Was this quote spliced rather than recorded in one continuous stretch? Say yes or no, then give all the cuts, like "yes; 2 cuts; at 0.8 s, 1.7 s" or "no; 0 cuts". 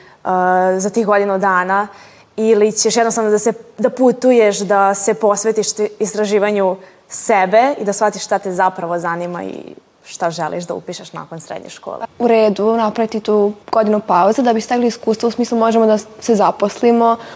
yes; 2 cuts; at 12.0 s, 13.6 s